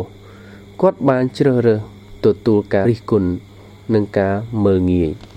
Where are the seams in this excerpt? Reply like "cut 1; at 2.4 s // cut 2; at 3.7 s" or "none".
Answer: cut 1; at 2.8 s